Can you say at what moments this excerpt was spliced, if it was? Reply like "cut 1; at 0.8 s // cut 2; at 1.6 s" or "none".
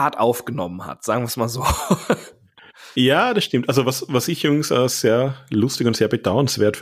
none